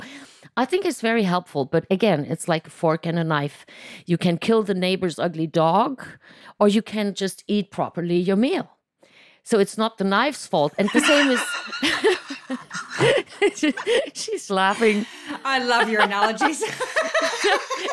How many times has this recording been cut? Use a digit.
1